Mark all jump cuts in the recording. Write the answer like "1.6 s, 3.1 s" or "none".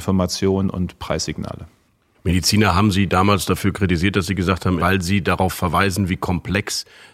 4.8 s